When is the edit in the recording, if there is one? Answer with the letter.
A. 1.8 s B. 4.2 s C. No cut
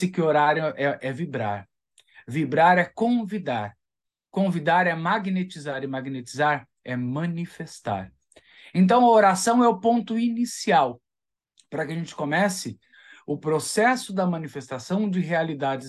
C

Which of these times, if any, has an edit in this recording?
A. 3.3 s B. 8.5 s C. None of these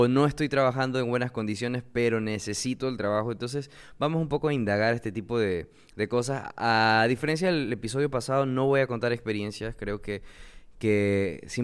C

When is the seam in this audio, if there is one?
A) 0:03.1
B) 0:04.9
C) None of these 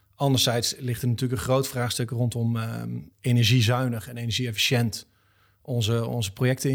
A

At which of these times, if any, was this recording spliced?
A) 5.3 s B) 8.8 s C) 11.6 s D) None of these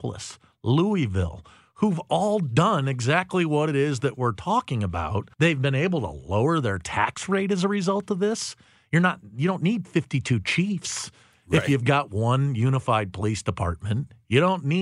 A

